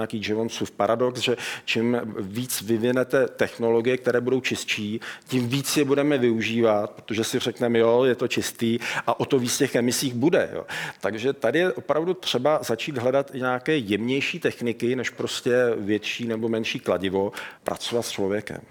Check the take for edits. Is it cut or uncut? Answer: cut